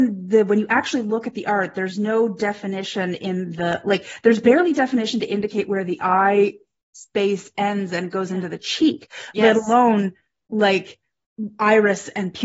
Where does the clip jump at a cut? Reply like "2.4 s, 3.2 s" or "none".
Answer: none